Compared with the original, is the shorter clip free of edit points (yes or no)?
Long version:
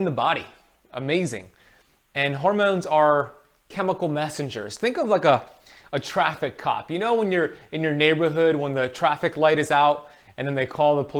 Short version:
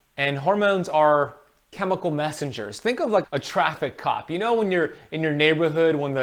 no